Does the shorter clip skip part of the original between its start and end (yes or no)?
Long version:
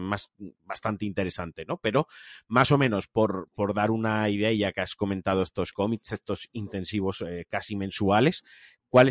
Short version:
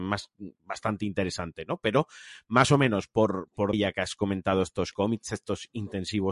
yes